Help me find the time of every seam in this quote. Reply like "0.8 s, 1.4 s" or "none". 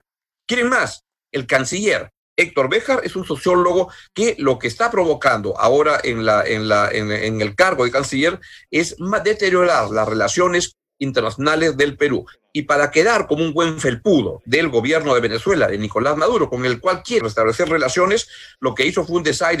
17.2 s

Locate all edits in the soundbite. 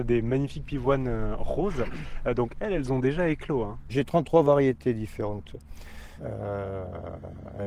3.9 s, 6.2 s

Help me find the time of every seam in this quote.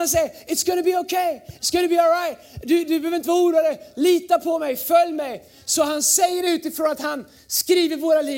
none

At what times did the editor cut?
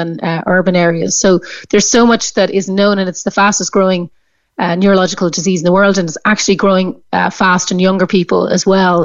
none

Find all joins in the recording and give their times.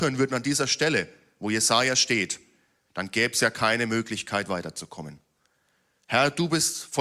none

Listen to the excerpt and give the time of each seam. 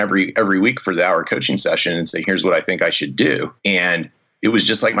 2.2 s, 3.6 s

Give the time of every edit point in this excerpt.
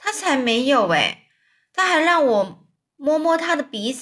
none

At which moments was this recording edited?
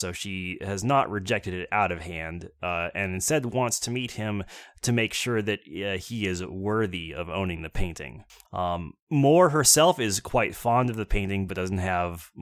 8.4 s

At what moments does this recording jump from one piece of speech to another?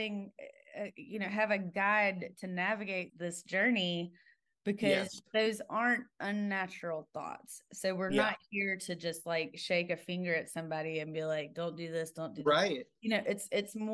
3.1 s

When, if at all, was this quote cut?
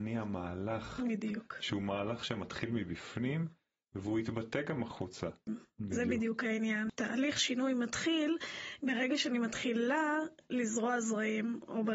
5.5 s

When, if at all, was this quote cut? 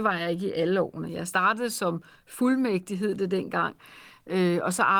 none

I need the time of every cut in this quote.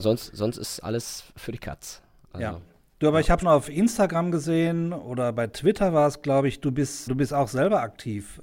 3.4 s, 7.1 s

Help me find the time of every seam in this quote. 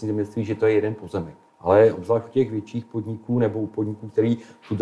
1.5 s

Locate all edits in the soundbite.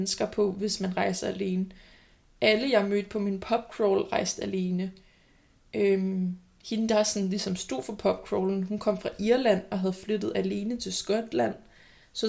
none

